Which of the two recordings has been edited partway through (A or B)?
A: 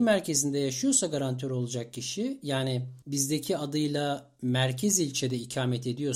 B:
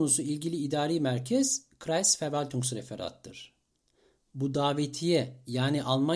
A